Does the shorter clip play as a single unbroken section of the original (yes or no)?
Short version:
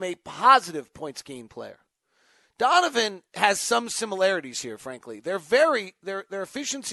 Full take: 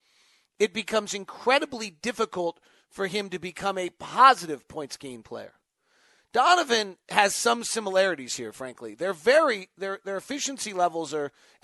yes